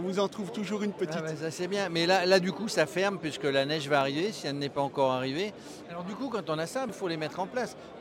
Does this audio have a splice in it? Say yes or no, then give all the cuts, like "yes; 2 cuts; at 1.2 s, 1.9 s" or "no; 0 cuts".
yes; 2 cuts; at 5.8 s, 6.9 s